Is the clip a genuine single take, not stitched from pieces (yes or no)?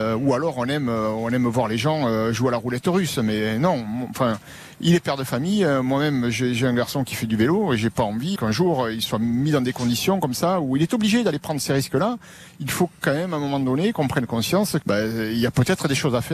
no